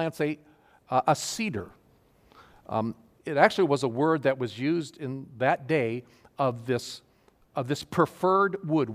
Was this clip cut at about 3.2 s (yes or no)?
yes